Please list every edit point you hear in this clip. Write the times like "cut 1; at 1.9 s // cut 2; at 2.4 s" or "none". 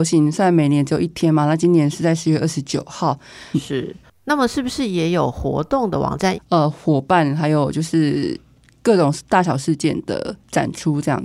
cut 1; at 3.5 s // cut 2; at 6.3 s